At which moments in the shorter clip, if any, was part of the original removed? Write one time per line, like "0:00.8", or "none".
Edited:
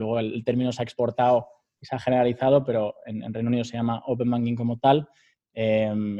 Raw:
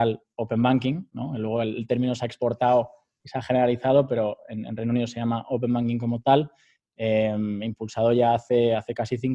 none